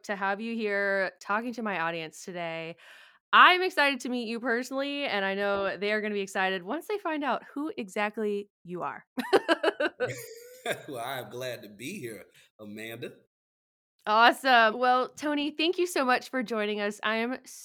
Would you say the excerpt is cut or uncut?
cut